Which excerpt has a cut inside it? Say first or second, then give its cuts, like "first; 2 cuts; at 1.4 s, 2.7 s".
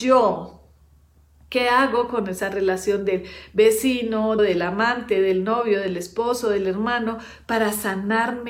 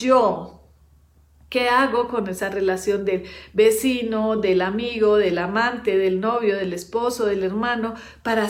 first; 1 cut; at 4.4 s